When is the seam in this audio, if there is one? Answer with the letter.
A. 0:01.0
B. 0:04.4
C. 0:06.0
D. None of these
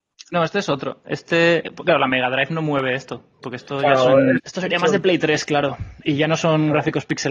B